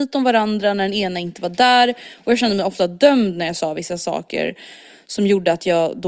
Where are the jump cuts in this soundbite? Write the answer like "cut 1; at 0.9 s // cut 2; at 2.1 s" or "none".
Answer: none